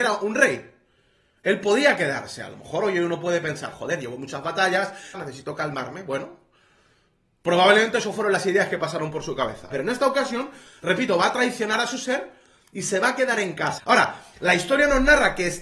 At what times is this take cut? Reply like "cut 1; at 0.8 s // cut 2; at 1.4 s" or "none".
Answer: cut 1; at 5.1 s // cut 2; at 9.7 s // cut 3; at 13.8 s